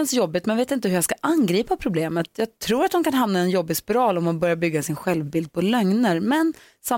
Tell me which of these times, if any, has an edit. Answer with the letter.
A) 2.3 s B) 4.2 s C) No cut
C